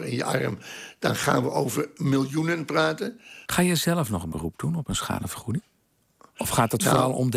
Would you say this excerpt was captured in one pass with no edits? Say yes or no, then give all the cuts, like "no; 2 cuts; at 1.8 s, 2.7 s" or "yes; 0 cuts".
no; 1 cut; at 3.5 s